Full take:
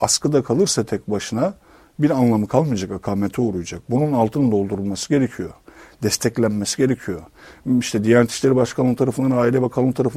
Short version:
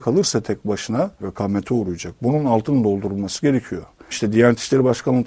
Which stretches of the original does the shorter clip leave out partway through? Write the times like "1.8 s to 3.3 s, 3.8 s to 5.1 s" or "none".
1.6 s to 2.9 s, 5.8 s to 7.8 s